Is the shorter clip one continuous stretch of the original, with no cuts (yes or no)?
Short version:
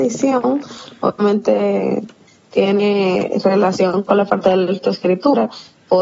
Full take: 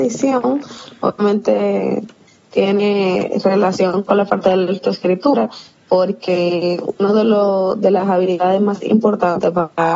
yes